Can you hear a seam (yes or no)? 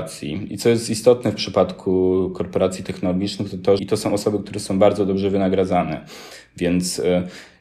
yes